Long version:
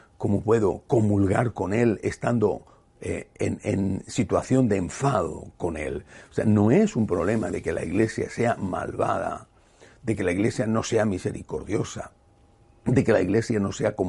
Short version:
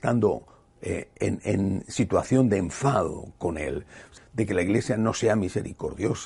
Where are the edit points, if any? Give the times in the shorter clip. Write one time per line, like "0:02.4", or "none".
0:04.2